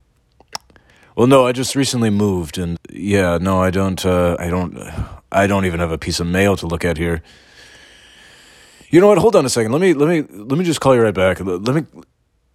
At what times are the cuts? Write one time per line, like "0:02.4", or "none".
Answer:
0:02.8
0:04.4